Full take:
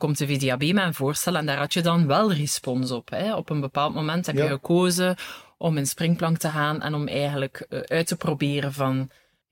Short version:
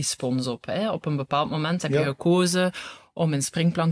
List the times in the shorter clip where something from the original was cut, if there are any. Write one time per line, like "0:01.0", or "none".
none